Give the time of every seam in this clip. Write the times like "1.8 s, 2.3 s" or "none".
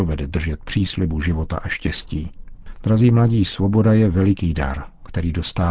2.8 s